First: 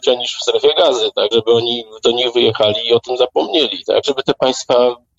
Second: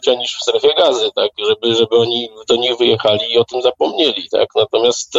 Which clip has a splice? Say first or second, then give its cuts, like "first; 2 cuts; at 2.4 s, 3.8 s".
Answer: first; 2 cuts; at 1.3 s, 4.0 s